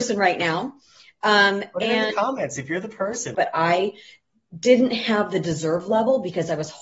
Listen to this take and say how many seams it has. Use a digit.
1